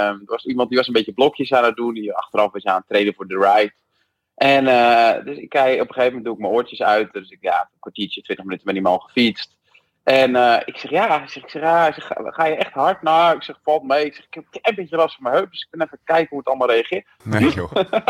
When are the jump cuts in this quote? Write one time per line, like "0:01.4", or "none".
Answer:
0:17.2